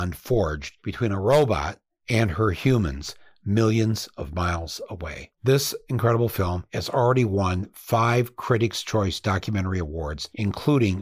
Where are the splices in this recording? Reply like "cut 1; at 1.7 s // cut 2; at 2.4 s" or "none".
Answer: cut 1; at 5.3 s